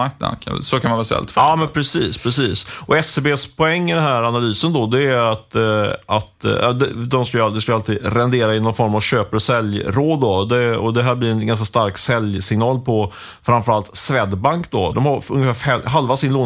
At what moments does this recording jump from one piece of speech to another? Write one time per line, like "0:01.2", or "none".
0:14.9